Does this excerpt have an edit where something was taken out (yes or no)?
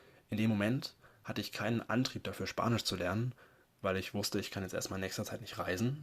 no